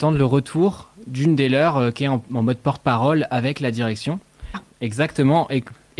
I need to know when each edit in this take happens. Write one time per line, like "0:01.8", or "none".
0:04.5

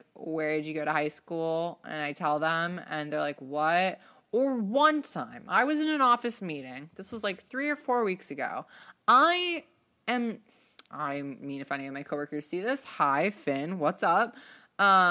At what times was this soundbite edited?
none

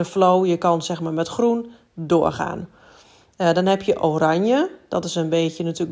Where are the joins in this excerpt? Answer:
none

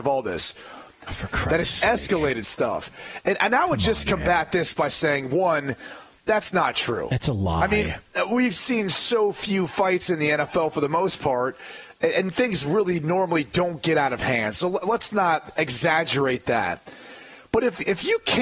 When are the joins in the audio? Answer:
0:01.1

